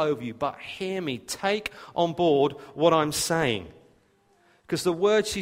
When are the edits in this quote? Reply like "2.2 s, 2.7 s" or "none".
none